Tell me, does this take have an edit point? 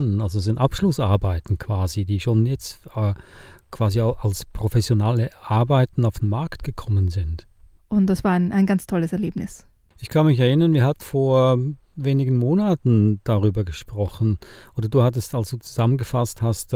yes; 2 cuts; at 7.8 s, 11.0 s

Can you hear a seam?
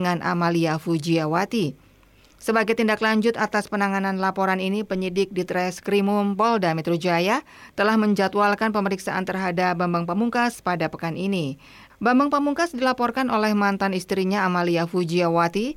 yes; 1 cut; at 11.9 s

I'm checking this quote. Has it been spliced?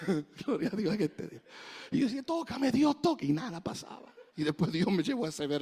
yes; 1 cut; at 4.3 s

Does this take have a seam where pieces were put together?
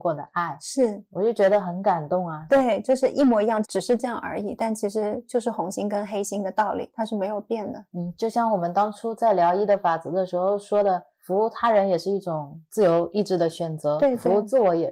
yes; 2 cuts; at 2.5 s, 3.6 s

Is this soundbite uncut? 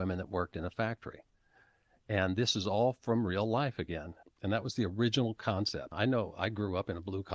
no; 2 cuts; at 4.2 s, 5.9 s

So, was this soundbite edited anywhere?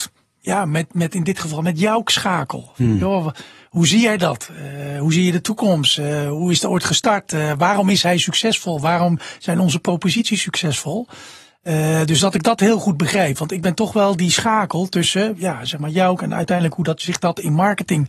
no; 0 cuts

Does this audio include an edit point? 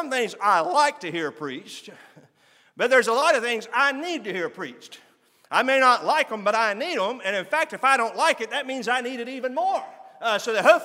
no; 0 cuts

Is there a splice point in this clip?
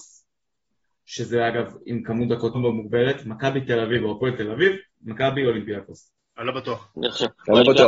yes; 2 cuts; at 2.5 s, 4.9 s

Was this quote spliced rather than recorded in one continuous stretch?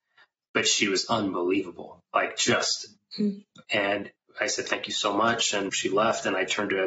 yes; 2 cuts; at 3.6 s, 5.7 s

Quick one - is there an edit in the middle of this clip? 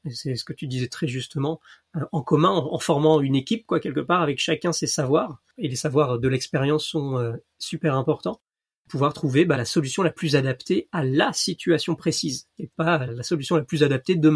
yes; 2 cuts; at 9.5 s, 13.1 s

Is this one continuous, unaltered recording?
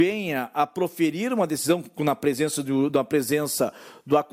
yes; 0 cuts

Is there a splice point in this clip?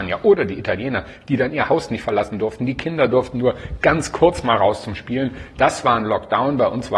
no; 0 cuts

